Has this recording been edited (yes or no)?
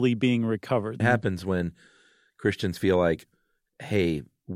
yes